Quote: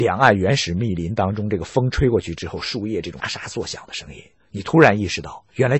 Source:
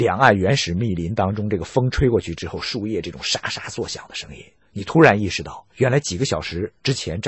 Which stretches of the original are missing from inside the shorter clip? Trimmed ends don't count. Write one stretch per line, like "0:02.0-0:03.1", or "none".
0:03.2-0:03.4